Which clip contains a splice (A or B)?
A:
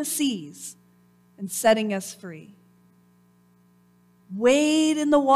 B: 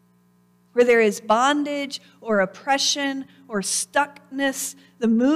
A